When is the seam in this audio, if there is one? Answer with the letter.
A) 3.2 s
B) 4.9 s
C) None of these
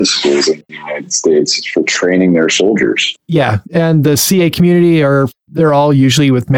A